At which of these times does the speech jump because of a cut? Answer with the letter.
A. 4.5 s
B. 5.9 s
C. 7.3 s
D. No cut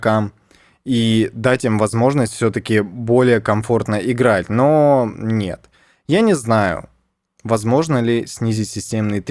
D